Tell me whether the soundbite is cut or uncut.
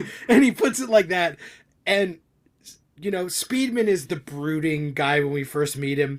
cut